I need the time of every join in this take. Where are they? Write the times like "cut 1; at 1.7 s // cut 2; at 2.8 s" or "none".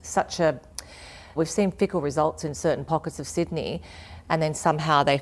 cut 1; at 1.4 s // cut 2; at 4.2 s